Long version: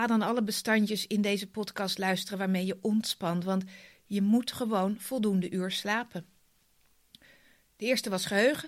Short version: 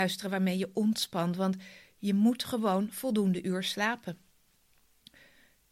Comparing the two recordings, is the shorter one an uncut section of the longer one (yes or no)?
yes